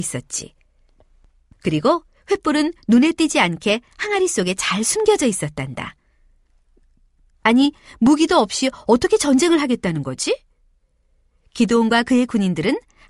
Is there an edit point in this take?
yes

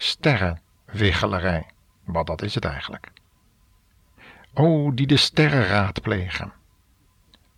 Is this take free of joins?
yes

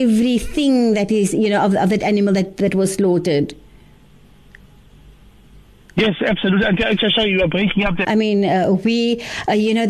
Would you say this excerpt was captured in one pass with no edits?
no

